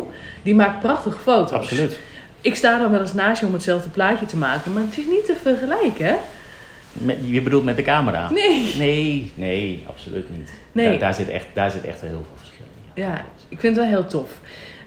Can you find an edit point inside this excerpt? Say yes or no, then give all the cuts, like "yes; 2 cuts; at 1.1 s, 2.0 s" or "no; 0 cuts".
no; 0 cuts